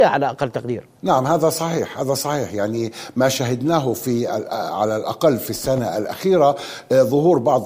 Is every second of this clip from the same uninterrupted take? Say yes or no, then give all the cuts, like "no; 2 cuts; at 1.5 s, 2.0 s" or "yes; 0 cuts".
no; 1 cut; at 1.0 s